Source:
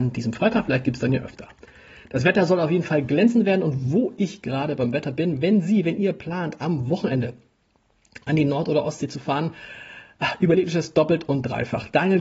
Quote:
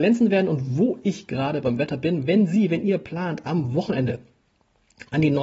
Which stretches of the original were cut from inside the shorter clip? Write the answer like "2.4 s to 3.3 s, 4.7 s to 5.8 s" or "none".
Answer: none